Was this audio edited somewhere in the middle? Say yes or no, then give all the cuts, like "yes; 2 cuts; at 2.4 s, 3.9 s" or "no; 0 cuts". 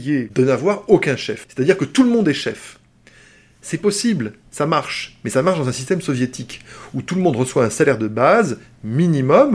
no; 0 cuts